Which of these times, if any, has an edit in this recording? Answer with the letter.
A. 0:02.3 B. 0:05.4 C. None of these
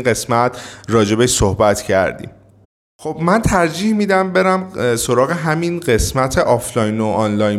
C